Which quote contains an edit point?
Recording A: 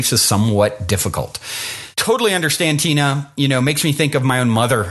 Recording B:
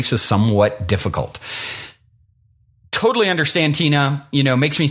A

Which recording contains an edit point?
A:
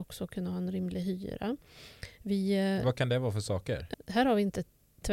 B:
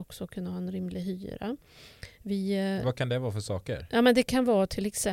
A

